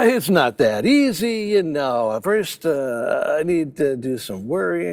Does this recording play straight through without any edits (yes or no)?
yes